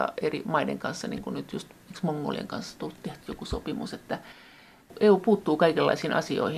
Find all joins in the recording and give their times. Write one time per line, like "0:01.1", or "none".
0:03.2